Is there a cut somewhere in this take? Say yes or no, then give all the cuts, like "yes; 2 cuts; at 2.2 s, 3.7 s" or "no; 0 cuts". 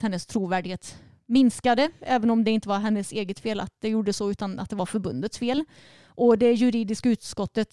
no; 0 cuts